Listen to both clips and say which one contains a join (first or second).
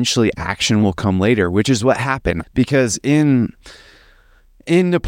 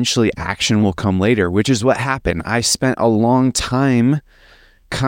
first